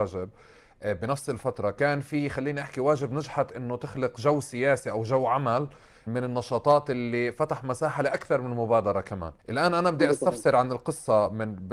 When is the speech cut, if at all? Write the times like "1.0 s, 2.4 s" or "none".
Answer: 6.1 s, 9.4 s